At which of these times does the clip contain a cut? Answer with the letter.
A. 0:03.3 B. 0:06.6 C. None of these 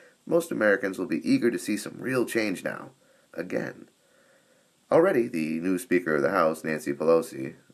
A